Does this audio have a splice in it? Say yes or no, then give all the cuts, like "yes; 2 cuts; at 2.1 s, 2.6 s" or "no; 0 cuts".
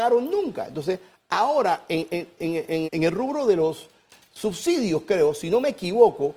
yes; 1 cut; at 2.8 s